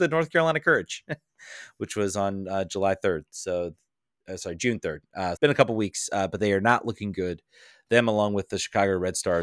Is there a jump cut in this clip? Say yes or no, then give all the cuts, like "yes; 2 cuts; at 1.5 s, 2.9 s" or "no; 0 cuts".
yes; 1 cut; at 5.4 s